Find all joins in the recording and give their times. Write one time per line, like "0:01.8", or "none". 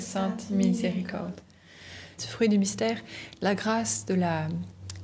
0:02.2